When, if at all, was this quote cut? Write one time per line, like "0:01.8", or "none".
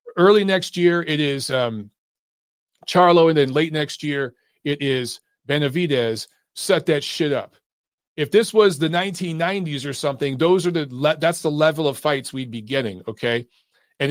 0:06.5

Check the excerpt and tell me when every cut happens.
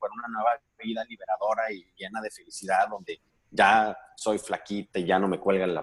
none

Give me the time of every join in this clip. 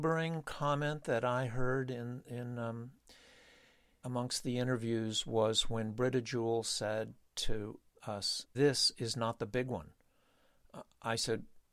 none

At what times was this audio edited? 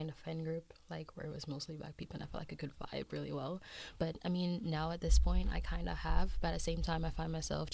none

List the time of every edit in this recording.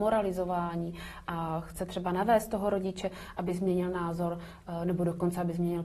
none

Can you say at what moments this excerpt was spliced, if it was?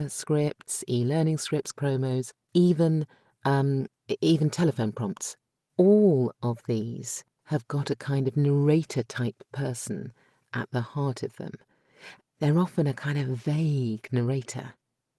0:01.7
0:12.2

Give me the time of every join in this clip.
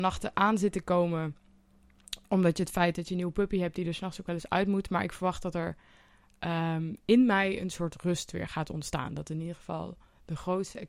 none

